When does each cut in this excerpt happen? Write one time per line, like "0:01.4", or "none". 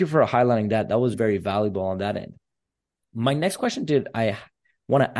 0:01.1

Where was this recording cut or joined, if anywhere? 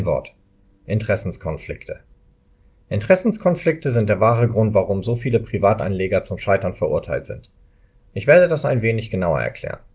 none

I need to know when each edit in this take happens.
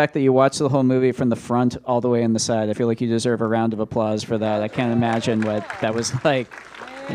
none

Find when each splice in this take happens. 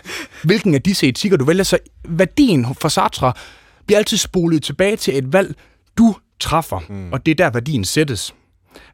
none

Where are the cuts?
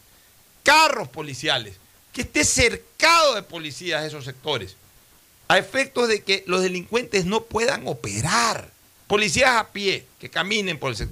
0:09.1

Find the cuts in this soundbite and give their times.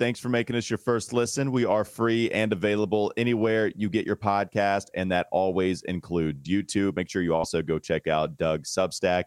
none

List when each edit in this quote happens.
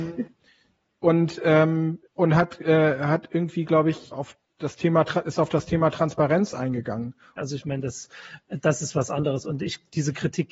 0:02.1
0:04.1
0:07.4

